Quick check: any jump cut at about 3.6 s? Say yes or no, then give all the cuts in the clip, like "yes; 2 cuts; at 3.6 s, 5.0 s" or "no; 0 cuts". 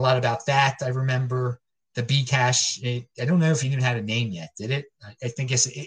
no; 0 cuts